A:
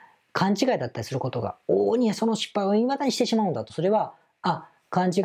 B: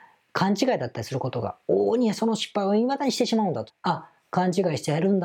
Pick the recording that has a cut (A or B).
B